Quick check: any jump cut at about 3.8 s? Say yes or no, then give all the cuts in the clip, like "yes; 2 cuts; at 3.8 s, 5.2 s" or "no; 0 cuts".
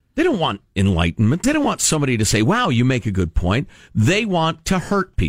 no; 1 cut; at 1.4 s